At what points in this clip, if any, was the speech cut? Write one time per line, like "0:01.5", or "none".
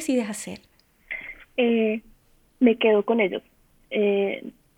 none